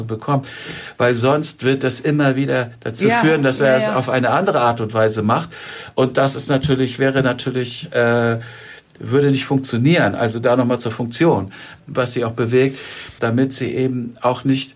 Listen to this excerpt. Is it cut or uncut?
cut